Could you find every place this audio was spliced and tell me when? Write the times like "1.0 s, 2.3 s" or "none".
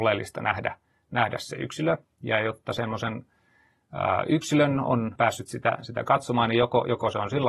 5.2 s